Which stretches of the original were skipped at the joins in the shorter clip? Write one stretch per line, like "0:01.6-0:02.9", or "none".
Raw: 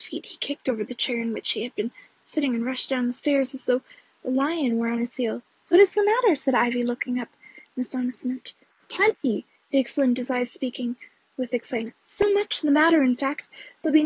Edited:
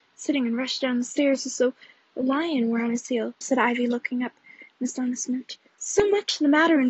0:05.5-0:06.4
0:08.7-0:12.0